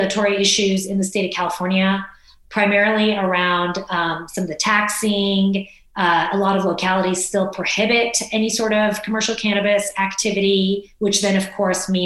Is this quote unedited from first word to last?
yes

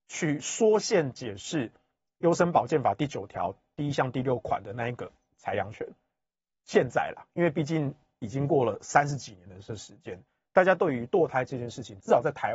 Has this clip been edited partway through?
no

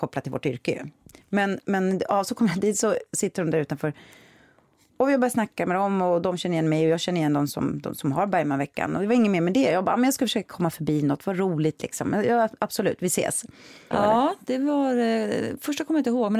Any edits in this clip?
yes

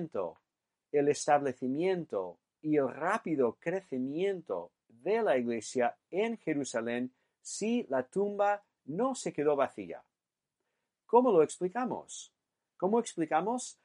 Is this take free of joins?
yes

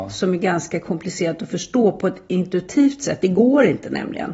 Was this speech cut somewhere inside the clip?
no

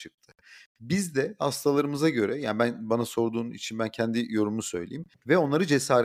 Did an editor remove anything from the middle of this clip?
yes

